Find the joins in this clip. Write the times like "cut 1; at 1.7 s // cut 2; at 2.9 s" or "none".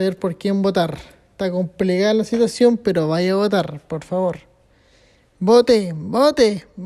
none